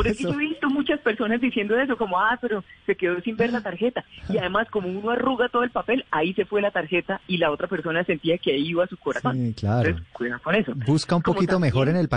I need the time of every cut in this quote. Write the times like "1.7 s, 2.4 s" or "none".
none